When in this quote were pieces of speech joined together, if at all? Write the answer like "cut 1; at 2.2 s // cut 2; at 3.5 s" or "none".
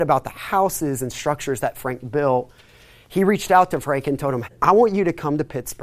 cut 1; at 4.4 s

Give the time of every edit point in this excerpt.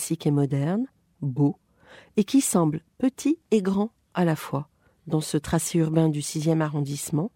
none

